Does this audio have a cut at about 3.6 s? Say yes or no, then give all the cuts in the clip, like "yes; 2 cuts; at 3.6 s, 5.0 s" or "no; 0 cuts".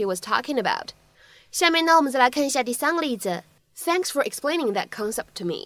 yes; 1 cut; at 3.6 s